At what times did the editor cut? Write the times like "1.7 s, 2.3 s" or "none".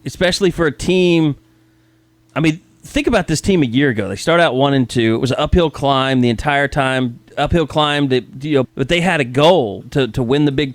8.6 s, 9.8 s